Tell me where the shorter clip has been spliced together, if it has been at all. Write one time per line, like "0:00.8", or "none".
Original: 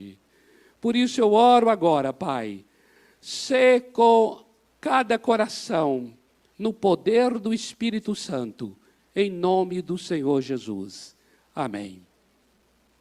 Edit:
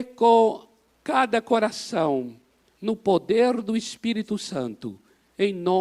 none